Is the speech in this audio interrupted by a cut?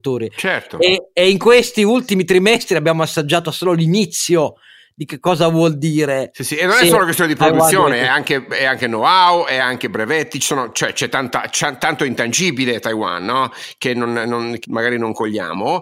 no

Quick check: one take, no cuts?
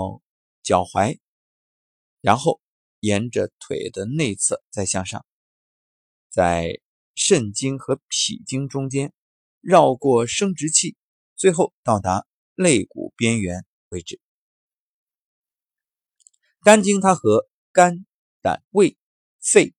no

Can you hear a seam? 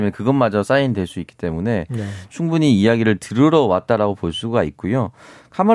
no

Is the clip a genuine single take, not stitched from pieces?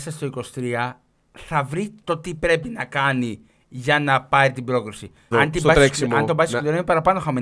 no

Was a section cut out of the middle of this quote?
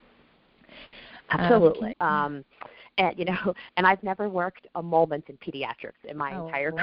yes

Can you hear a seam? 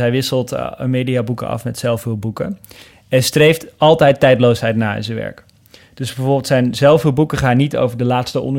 no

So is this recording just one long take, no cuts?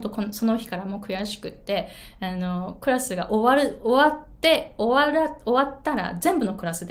yes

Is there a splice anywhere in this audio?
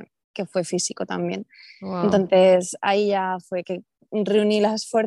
yes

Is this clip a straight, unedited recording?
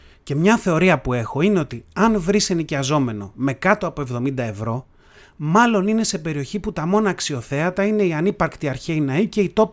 yes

